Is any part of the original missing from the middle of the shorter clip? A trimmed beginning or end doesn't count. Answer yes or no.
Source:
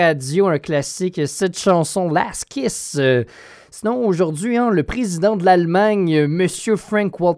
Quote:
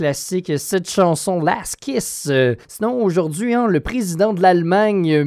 yes